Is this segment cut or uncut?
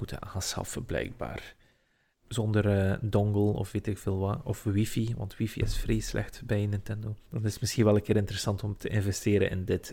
cut